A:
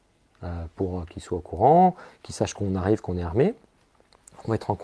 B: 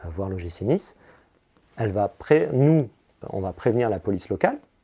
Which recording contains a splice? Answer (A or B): B